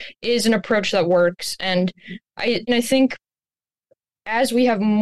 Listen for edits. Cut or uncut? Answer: cut